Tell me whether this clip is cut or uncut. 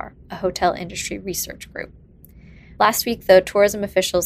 cut